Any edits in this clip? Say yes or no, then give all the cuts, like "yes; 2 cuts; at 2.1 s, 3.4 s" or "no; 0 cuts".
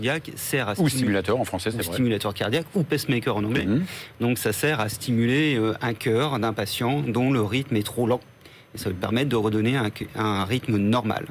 no; 0 cuts